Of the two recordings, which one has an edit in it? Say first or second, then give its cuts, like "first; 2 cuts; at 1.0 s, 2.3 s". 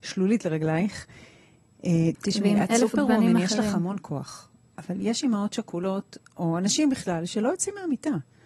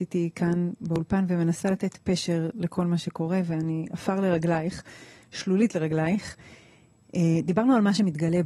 first; 1 cut; at 2.1 s